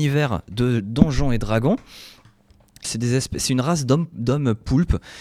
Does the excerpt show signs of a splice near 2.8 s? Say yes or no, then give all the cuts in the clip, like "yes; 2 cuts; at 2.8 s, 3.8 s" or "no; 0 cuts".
yes; 1 cut; at 2.8 s